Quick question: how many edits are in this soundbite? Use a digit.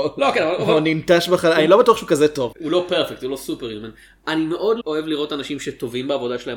2